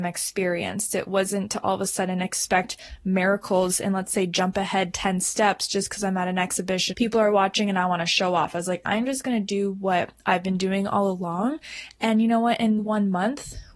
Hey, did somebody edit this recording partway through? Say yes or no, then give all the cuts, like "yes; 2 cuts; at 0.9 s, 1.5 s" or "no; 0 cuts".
yes; 2 cuts; at 6.9 s, 12.8 s